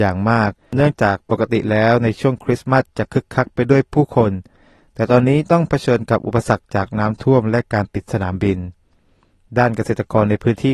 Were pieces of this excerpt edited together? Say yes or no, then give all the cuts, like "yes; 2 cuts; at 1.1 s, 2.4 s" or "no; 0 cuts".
no; 0 cuts